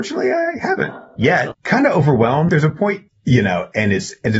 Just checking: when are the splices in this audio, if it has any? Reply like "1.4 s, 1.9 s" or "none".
1.5 s, 3.1 s

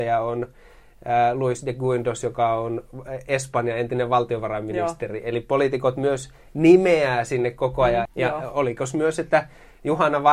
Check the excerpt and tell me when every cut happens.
8.1 s

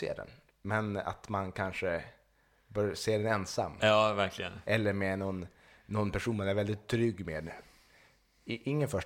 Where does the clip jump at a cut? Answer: none

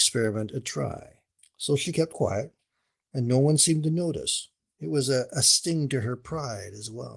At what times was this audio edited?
1.4 s

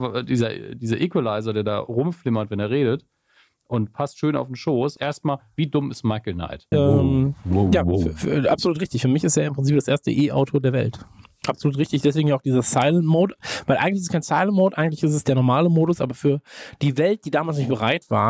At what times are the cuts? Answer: 5.0 s, 6.7 s

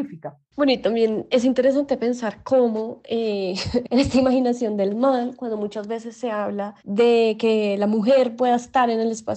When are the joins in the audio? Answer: 6.8 s

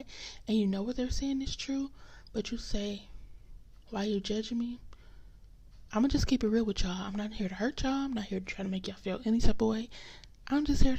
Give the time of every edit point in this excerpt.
5.9 s

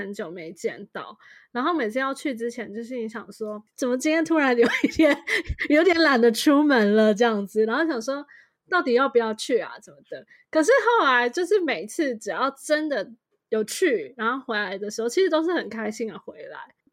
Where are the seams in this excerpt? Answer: none

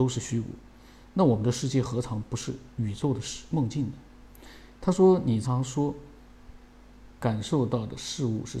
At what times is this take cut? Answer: 5.4 s, 7.2 s

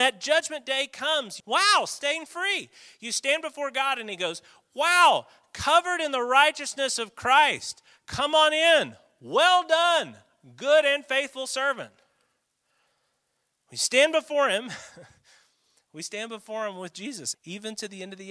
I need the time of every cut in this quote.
1.4 s, 17.3 s

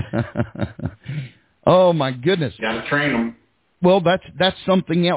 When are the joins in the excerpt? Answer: 2.6 s

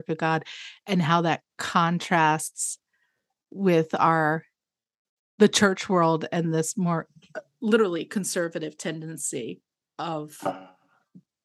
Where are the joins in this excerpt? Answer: none

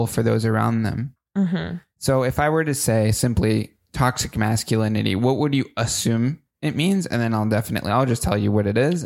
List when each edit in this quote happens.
none

